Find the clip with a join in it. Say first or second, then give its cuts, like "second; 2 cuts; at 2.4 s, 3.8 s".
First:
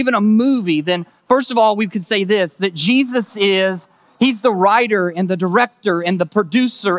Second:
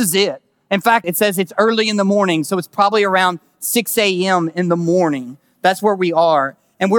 second; 1 cut; at 1.0 s